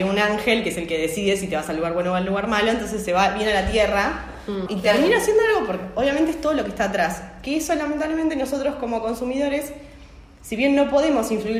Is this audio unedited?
no; 1 cut; at 4.7 s

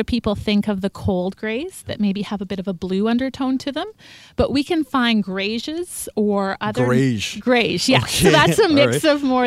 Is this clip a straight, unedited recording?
yes; 0 cuts

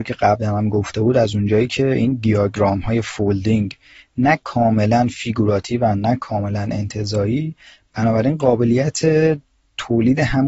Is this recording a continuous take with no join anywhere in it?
yes; 0 cuts

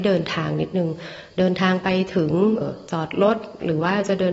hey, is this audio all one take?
no; 1 cut; at 2.6 s

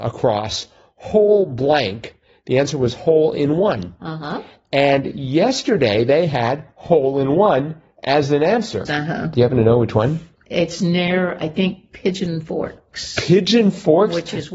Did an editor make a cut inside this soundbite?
yes; 1 cut; at 8.9 s

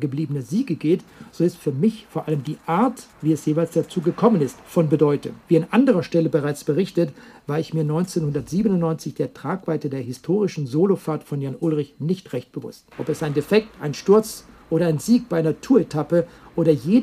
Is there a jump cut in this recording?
yes; 3 cuts; at 3.1 s, 5.4 s, 12.9 s

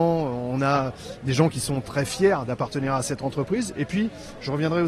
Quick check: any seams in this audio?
no; 0 cuts

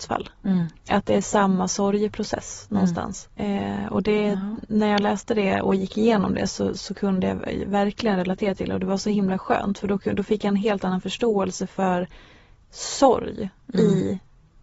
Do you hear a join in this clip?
yes; 1 cut; at 3.3 s

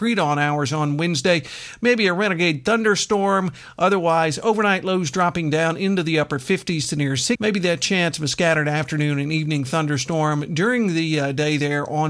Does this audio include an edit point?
yes; 1 cut; at 7.4 s

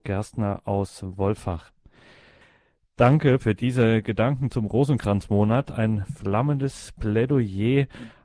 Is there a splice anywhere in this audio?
yes; 1 cut; at 3.4 s

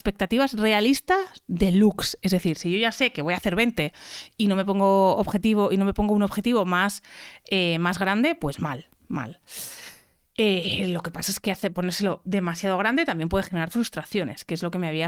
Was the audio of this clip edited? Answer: no; 0 cuts

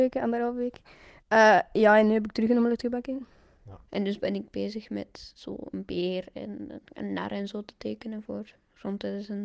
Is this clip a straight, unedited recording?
no; 1 cut; at 3.9 s

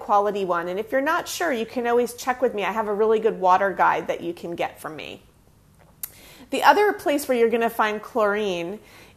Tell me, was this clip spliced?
no; 0 cuts

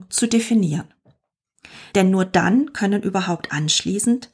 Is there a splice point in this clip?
yes; 1 cut; at 1.9 s

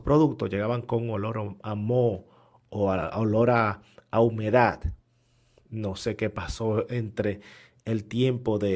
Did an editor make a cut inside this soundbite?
no; 0 cuts

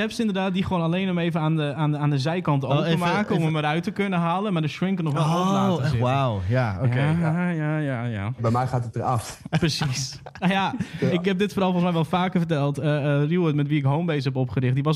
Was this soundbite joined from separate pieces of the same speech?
yes; 1 cut; at 8.4 s

